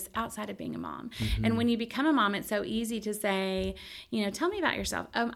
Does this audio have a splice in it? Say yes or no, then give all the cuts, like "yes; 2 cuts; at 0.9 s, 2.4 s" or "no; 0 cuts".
no; 0 cuts